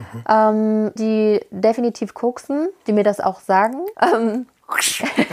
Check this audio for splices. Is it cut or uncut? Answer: cut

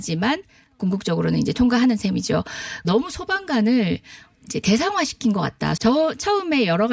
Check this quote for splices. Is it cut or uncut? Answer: cut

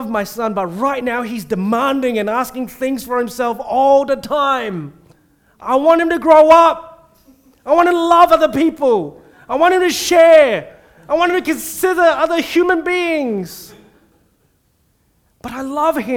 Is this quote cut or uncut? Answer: uncut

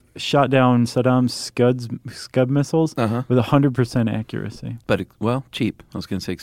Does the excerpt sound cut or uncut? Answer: cut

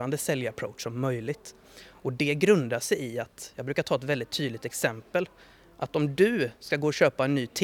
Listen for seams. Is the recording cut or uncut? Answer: uncut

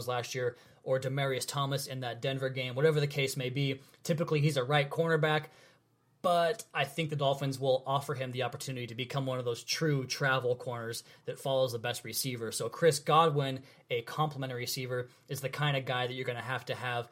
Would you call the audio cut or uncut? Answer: uncut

